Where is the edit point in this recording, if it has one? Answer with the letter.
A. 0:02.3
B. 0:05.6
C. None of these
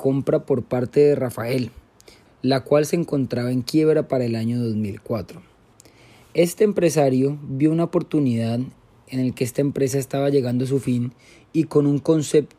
A